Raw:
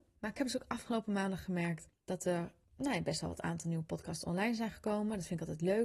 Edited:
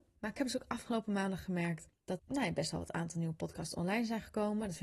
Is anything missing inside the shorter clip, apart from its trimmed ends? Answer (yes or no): yes